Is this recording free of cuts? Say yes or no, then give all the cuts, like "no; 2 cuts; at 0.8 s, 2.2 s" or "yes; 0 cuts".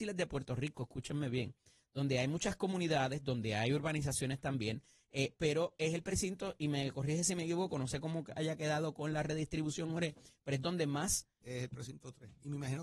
no; 1 cut; at 11.4 s